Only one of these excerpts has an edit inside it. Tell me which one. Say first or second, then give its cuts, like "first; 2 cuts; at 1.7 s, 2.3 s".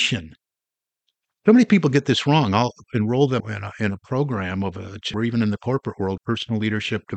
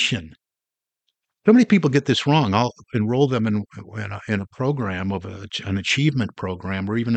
first; 3 cuts; at 3.4 s, 5.1 s, 6.2 s